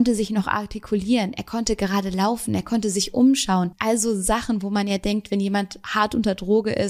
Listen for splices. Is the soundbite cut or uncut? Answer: uncut